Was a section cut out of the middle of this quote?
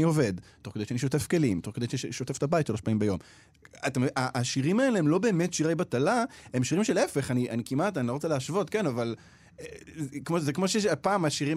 no; 0 cuts

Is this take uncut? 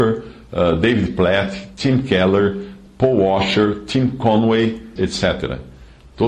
no; 1 cut; at 5.0 s

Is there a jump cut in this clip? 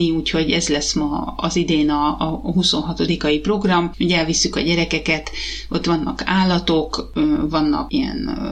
no; 0 cuts

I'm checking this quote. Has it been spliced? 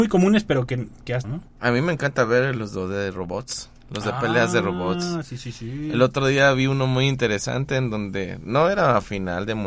yes; 1 cut; at 1.2 s

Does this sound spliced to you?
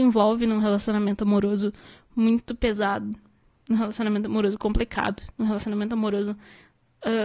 no; 0 cuts

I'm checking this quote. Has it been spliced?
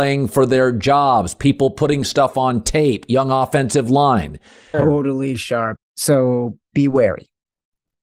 yes; 2 cuts; at 4.7 s, 5.8 s

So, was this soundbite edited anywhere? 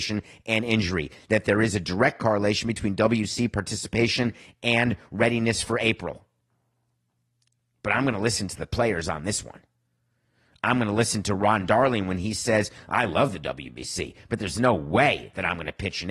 no; 0 cuts

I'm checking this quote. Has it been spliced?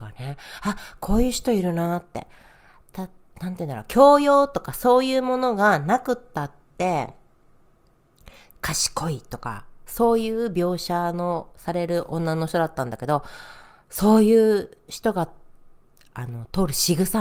no; 0 cuts

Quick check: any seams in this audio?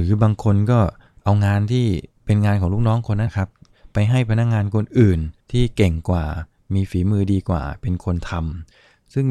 yes; 2 cuts; at 3.3 s, 5.4 s

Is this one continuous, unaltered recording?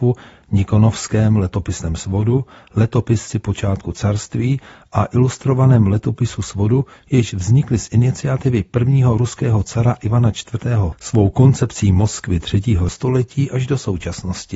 no; 2 cuts; at 10.9 s, 12.9 s

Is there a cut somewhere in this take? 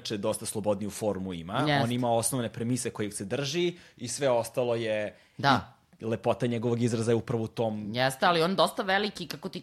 no; 0 cuts

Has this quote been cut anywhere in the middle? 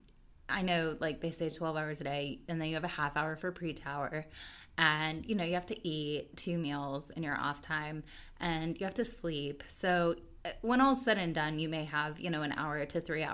no; 0 cuts

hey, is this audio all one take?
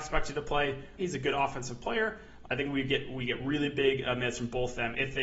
no; 2 cuts; at 1.0 s, 2.4 s

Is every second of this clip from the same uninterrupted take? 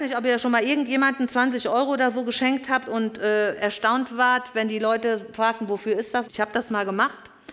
no; 1 cut; at 6.2 s

